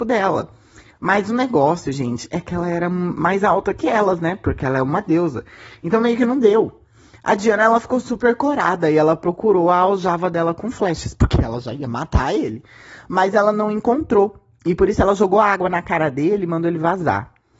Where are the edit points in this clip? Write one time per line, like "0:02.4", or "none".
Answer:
none